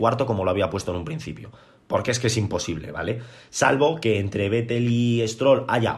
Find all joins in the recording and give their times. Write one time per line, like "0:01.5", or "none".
none